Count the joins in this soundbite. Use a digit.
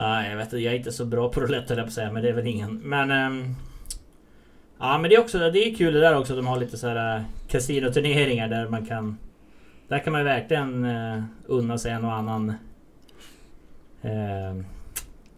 0